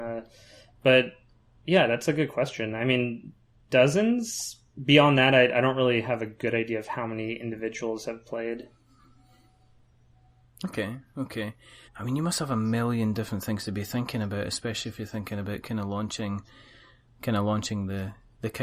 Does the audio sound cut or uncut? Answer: cut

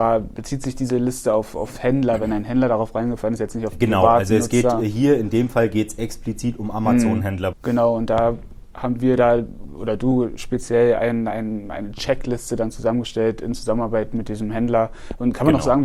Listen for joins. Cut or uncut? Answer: cut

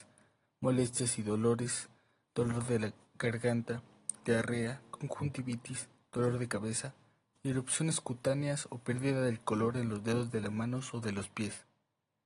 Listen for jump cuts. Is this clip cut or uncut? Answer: cut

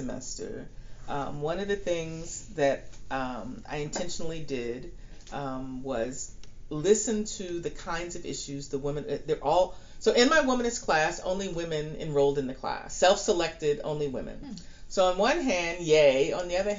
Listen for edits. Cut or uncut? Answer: uncut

